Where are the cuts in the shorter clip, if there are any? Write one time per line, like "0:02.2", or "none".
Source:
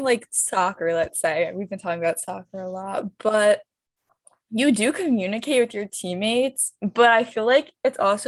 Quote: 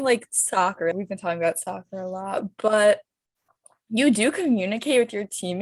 0:00.9